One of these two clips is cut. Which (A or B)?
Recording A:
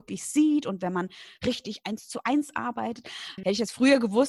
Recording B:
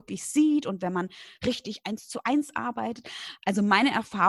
A